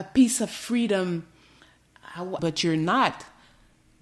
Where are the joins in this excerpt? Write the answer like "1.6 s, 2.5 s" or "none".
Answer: 2.4 s